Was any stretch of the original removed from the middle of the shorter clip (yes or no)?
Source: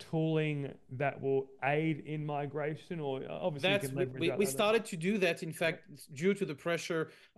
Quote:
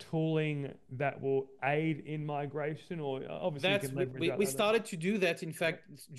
no